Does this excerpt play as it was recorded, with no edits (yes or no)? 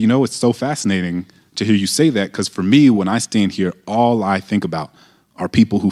yes